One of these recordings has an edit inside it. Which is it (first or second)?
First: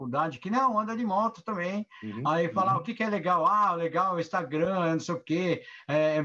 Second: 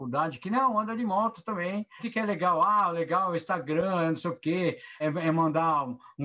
second